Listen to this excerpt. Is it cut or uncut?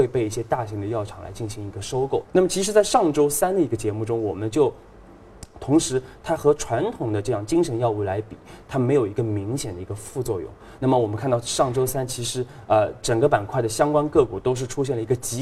cut